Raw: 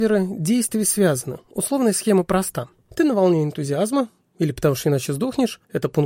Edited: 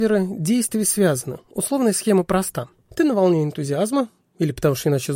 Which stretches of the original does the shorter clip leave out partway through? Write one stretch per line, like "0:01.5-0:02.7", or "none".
none